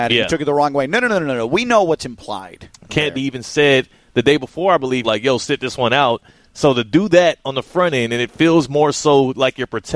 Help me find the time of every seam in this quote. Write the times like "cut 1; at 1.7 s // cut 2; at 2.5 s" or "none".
cut 1; at 3.1 s // cut 2; at 5.0 s